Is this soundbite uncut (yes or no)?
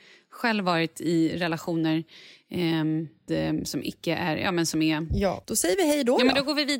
no